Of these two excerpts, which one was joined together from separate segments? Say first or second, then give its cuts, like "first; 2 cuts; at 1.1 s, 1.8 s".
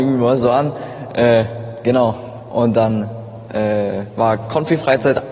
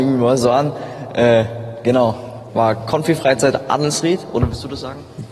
second; 1 cut; at 2.5 s